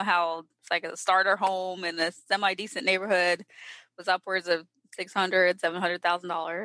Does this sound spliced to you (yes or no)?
no